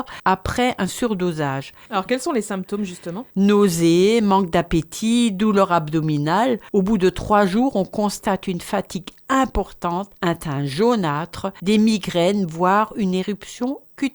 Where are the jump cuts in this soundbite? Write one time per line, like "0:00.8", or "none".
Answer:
none

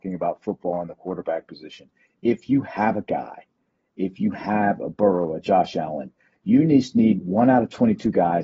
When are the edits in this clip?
0:07.2

